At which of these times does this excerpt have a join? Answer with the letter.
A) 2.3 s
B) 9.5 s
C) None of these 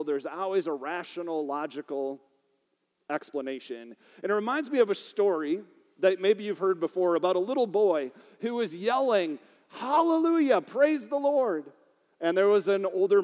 C